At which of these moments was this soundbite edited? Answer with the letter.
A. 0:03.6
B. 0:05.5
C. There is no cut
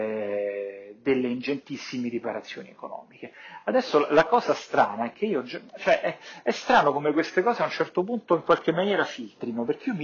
C